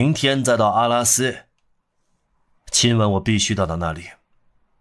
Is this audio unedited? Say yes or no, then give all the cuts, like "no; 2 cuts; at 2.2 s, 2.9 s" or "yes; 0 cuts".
yes; 0 cuts